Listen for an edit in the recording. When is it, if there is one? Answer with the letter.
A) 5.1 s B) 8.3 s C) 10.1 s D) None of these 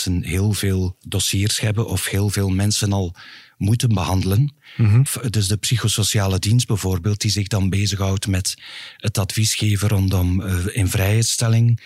A